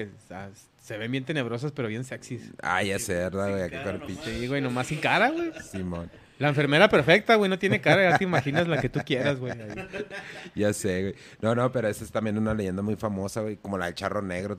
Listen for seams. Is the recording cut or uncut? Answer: uncut